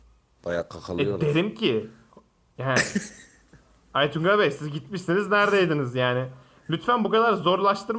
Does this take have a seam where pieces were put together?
no; 0 cuts

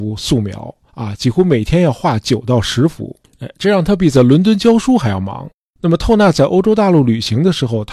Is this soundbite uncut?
yes; 0 cuts

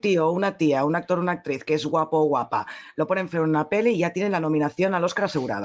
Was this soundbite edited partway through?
no; 0 cuts

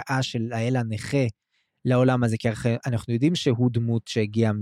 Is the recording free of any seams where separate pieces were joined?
yes; 0 cuts

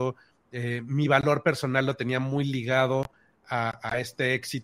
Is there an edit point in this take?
no; 0 cuts

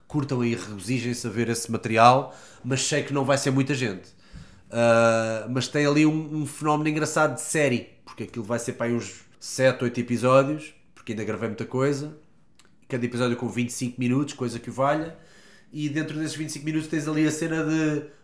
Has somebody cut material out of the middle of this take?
yes; 1 cut; at 9.3 s

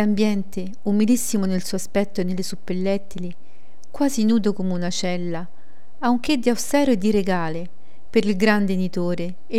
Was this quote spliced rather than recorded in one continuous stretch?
no; 0 cuts

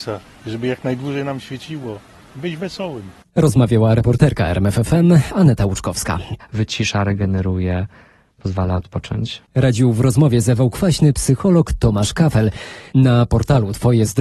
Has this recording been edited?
yes; 1 cut; at 6.4 s

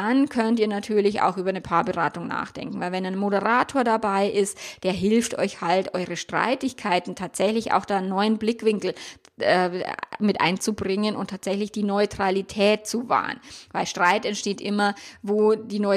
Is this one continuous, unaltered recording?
yes; 0 cuts

